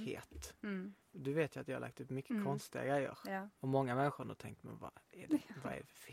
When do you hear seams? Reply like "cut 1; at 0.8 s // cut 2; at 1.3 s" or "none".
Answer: cut 1; at 1.0 s // cut 2; at 3.6 s